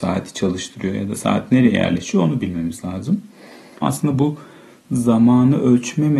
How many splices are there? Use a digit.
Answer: 1